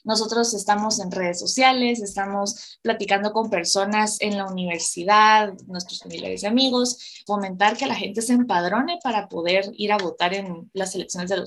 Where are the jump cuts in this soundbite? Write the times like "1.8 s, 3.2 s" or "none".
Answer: 7.3 s